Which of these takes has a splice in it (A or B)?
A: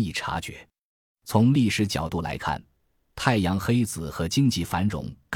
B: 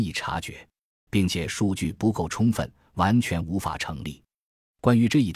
B